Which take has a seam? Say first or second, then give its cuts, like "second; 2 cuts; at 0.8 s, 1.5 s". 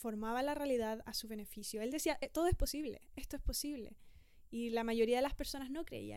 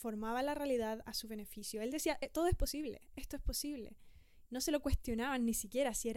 second; 1 cut; at 4.5 s